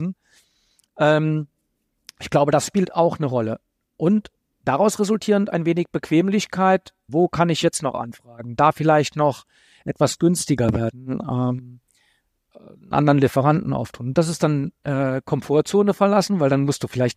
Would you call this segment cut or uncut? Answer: cut